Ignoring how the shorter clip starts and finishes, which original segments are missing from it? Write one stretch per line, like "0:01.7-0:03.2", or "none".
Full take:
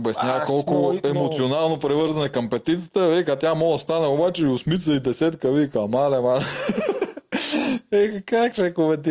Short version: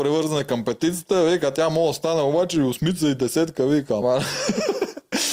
0:05.9-0:06.2